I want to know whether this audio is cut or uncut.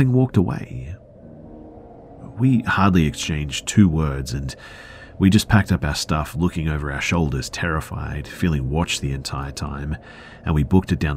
uncut